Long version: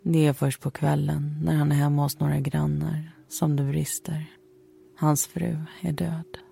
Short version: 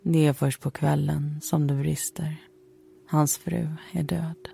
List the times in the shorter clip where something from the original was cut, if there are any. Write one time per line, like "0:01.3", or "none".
0:01.4